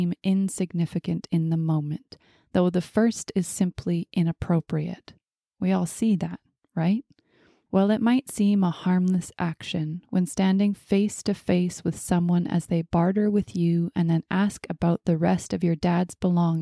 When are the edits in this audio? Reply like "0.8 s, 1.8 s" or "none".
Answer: 7.7 s